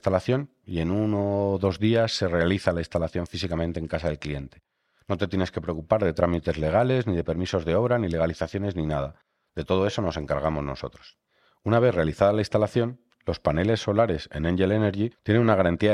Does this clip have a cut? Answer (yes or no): no